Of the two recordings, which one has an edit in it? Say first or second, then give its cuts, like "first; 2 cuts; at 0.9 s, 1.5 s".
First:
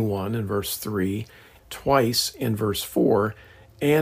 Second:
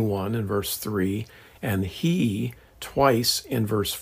first; 1 cut; at 1.6 s